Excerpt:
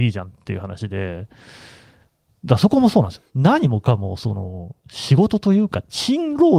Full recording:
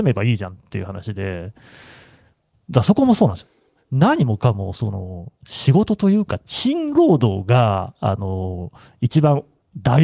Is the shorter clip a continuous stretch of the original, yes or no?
no